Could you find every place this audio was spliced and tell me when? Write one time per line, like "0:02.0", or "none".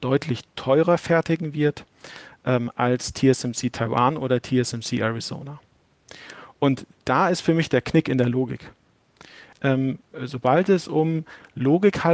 0:09.5

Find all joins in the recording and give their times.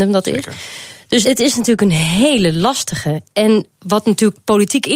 0:01.2

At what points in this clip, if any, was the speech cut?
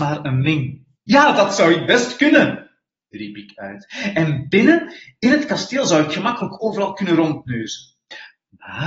0:00.9

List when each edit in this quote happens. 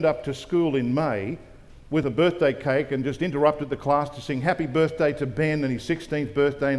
none

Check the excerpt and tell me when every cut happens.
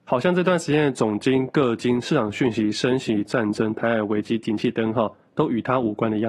0:03.2

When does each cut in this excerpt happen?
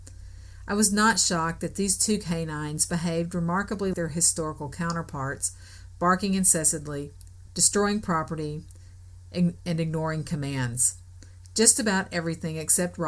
0:03.9
0:07.5

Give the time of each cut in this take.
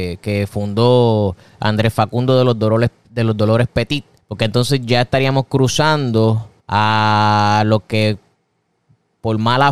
0:04.2
0:06.6

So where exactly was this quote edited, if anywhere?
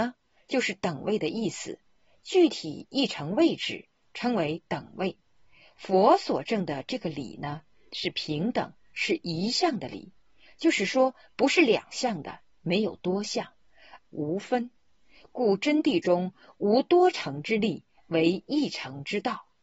0:14.0

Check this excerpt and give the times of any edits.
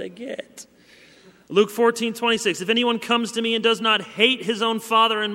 0:01.5

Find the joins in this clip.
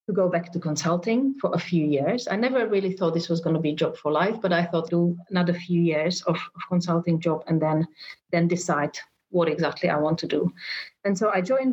0:04.9

